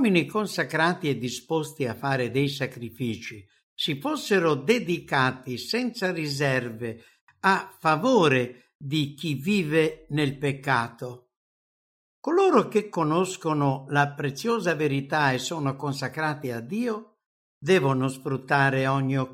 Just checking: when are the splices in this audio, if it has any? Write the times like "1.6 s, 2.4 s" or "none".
none